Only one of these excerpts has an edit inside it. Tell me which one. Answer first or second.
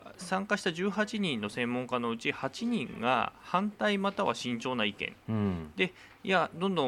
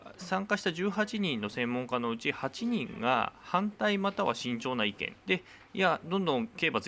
second